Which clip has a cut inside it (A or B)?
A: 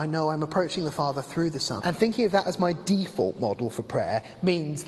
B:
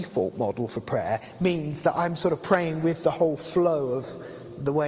A